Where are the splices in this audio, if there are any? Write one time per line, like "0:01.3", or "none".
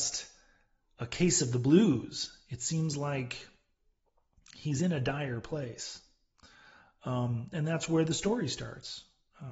none